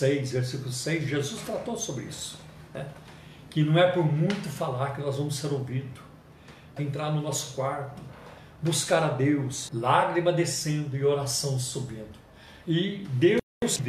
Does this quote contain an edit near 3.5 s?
no; 3 cuts; at 6.8 s, 9.7 s, 12.6 s

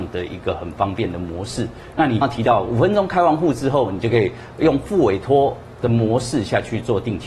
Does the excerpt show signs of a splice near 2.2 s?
yes; 1 cut; at 2.2 s

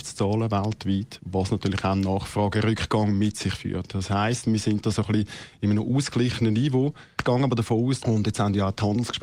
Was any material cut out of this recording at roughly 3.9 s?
no; 1 cut; at 8.0 s

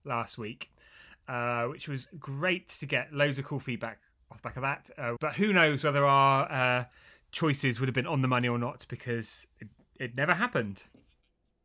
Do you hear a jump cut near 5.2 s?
yes; 1 cut; at 5.2 s

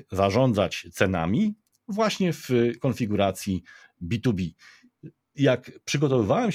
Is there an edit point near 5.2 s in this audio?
no; 0 cuts

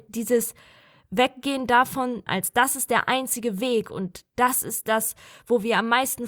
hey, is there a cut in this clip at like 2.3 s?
yes; 1 cut; at 2.3 s

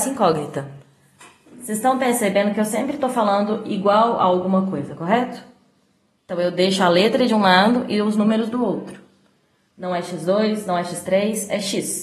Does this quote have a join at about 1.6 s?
no; 1 cut; at 9.7 s

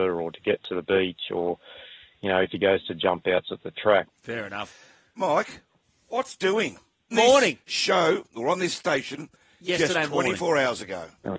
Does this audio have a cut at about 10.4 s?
no; 2 cuts; at 4.1 s, 7.1 s

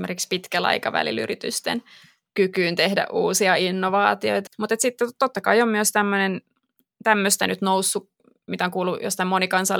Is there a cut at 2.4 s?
no; 2 cuts; at 4.5 s, 8.4 s

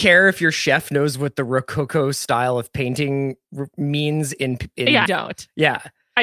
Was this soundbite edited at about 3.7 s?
no; 1 cut; at 5.1 s

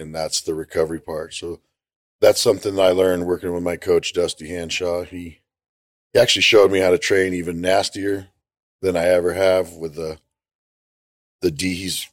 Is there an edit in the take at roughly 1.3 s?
no; 0 cuts

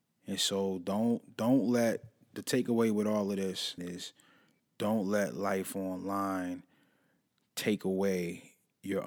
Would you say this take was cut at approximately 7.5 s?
no; 1 cut; at 3.8 s

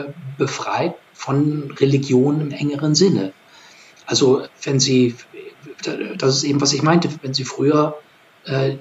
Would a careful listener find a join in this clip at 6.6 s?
no; 1 cut; at 4.5 s

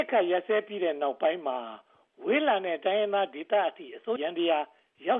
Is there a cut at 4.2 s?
yes; 1 cut; at 4.2 s

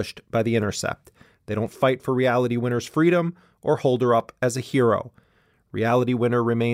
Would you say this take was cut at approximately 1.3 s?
yes; 1 cut; at 1.3 s

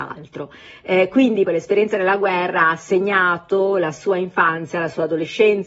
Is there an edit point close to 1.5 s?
yes; 1 cut; at 1.5 s

